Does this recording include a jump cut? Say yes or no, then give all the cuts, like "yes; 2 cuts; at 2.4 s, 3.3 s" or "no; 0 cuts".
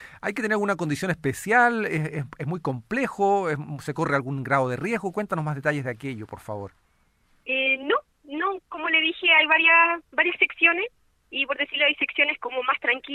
no; 0 cuts